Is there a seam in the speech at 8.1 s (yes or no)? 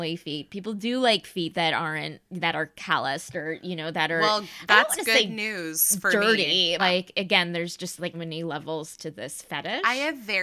yes